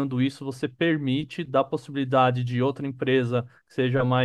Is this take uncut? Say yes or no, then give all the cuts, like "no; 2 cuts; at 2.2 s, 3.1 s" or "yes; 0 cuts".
yes; 0 cuts